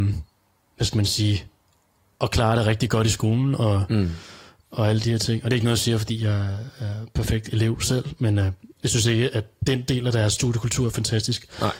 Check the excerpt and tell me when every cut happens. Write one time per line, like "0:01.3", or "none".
none

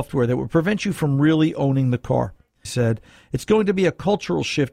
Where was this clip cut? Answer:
0:02.6

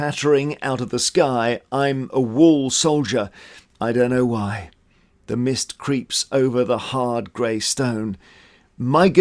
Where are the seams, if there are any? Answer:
none

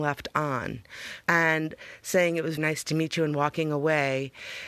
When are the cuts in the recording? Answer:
0:01.2
0:02.6

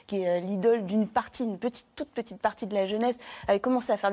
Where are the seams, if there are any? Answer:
none

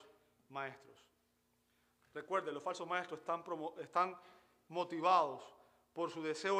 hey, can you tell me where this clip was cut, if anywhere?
none

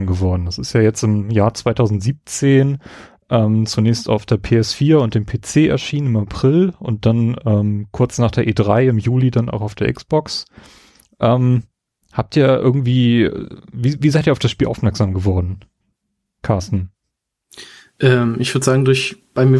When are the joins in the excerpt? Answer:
none

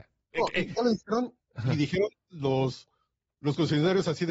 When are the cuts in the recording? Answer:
none

